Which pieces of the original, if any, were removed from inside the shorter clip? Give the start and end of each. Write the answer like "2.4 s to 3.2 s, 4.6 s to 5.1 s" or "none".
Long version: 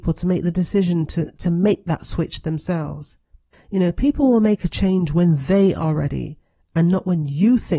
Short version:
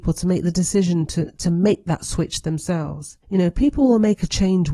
3.2 s to 3.6 s